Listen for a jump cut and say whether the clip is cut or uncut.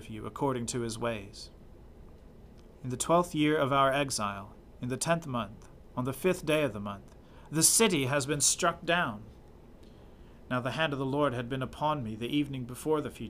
cut